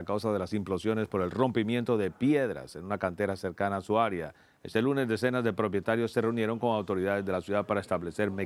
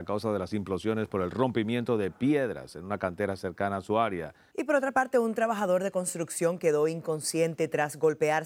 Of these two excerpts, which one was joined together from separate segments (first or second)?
second